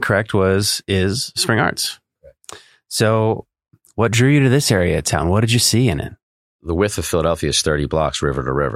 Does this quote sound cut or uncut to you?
uncut